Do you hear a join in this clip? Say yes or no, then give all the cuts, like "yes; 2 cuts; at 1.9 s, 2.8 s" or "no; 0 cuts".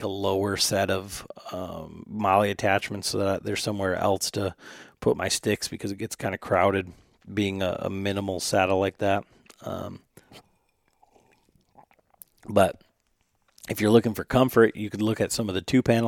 no; 0 cuts